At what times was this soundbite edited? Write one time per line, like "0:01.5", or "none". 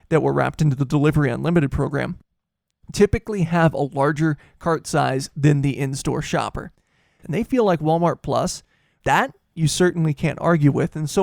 0:07.2
0:09.0